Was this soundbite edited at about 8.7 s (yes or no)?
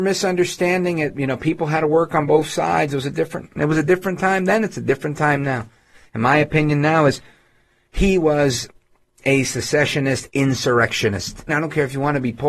no